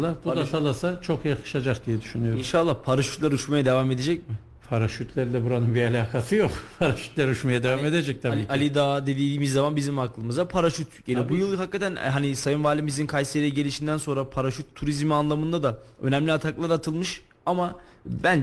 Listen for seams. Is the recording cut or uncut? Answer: uncut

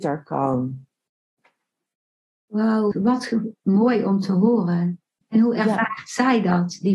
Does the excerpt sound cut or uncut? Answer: cut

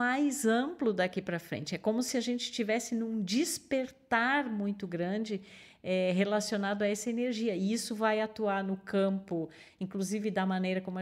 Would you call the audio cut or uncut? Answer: uncut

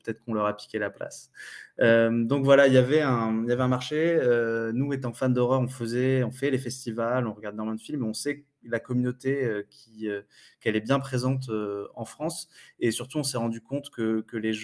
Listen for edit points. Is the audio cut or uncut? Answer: uncut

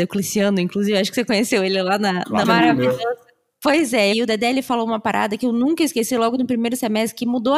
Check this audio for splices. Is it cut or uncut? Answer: cut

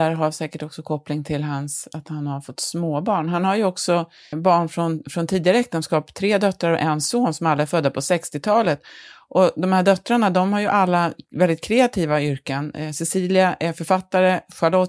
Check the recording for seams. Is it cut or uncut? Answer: cut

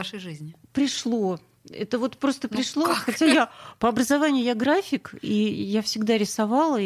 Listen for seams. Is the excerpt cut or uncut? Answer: uncut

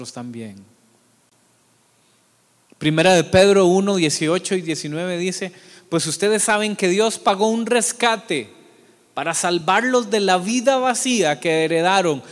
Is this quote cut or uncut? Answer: uncut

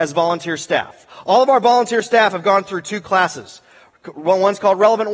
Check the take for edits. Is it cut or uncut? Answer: uncut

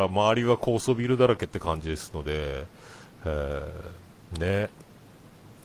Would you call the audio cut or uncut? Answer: uncut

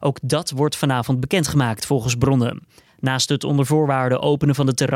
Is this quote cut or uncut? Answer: uncut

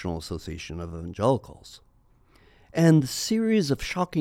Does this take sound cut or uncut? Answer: uncut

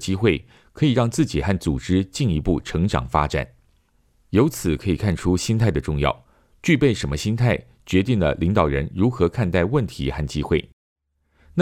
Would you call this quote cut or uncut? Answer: uncut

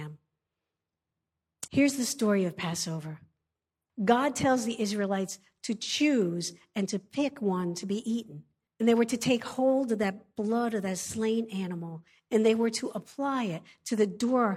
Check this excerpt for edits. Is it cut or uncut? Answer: cut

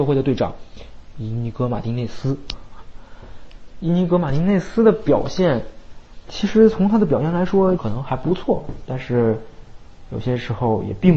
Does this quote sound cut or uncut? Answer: cut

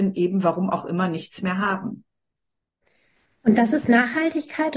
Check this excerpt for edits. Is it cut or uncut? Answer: uncut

